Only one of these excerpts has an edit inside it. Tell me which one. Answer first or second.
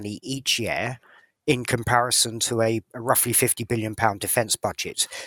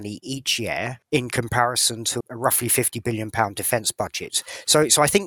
second